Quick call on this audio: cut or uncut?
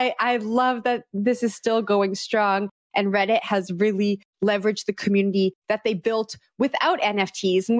uncut